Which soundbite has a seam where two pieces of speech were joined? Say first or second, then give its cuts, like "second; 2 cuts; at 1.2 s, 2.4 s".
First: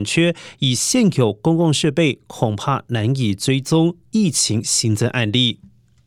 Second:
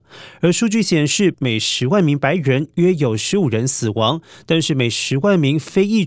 second; 1 cut; at 1.3 s